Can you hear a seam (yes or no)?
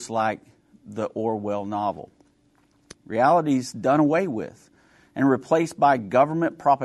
yes